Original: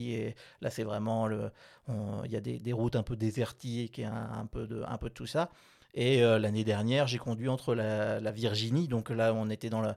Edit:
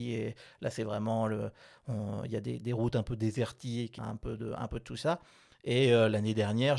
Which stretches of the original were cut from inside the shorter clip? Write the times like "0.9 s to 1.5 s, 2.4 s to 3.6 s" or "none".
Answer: 4.0 s to 4.3 s